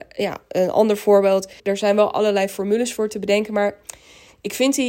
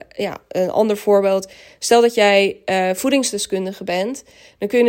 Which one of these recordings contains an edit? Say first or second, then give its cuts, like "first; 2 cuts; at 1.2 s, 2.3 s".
first; 1 cut; at 1.6 s